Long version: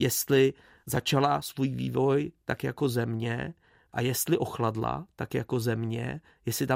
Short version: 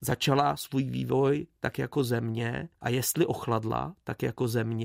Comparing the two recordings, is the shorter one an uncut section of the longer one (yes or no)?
no